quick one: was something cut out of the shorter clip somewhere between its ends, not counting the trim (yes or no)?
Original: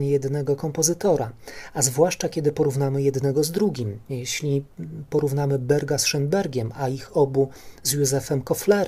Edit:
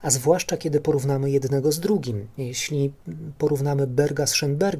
no